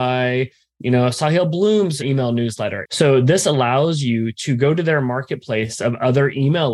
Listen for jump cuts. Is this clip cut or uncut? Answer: cut